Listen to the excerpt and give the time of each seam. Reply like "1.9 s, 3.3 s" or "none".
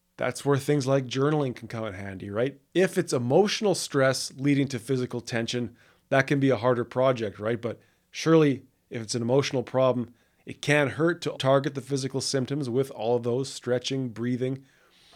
2.7 s, 11.3 s

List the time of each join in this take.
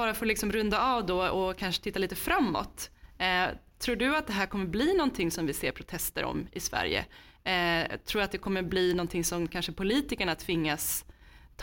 none

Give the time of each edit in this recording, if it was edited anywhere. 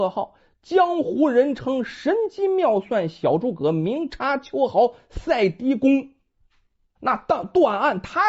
7.0 s

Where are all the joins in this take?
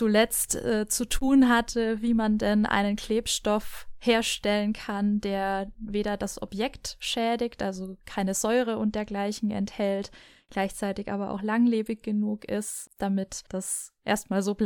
none

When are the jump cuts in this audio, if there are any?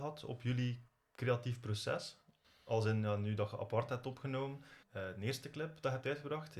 4.8 s

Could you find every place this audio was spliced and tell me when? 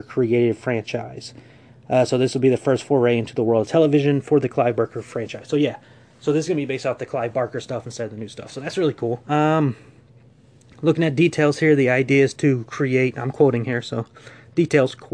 9.2 s

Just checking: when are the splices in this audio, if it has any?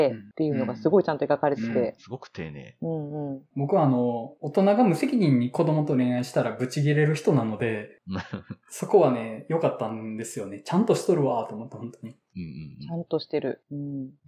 2.0 s

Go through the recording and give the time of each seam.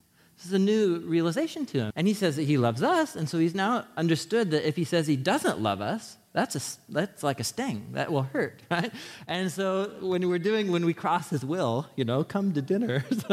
1.9 s

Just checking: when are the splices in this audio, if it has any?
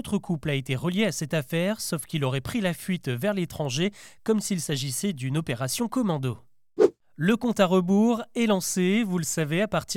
none

